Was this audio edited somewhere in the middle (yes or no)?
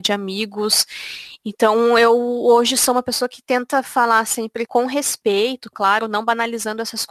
no